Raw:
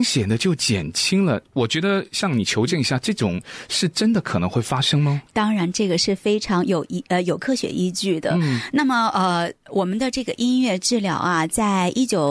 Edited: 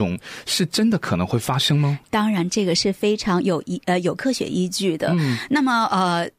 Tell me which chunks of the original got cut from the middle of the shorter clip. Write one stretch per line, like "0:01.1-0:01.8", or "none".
none